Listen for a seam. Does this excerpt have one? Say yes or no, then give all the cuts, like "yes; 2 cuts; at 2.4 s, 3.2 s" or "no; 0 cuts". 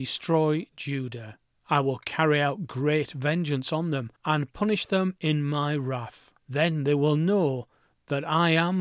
yes; 3 cuts; at 1.6 s, 4.2 s, 6.4 s